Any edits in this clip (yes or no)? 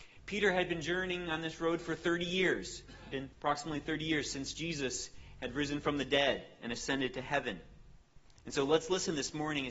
yes